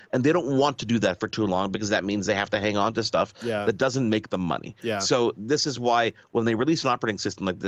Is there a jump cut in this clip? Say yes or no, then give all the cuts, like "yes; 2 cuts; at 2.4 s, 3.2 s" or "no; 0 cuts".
no; 0 cuts